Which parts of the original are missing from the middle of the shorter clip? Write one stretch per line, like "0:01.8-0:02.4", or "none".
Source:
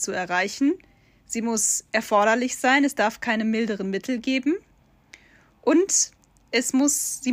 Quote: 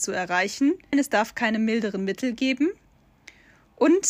0:00.9-0:02.8